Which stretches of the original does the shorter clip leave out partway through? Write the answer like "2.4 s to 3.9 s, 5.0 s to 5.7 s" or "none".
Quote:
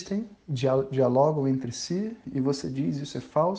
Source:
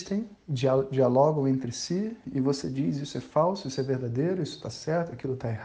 none